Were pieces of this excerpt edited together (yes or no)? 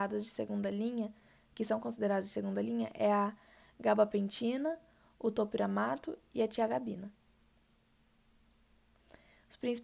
no